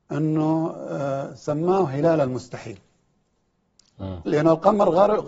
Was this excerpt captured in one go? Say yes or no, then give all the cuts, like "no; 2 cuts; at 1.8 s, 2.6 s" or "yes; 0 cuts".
no; 1 cut; at 4.3 s